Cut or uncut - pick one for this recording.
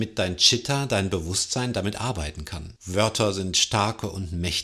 cut